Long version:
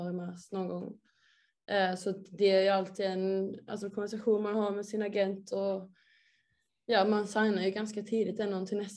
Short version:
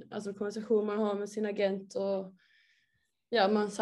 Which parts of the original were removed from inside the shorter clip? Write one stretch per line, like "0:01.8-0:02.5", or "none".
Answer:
none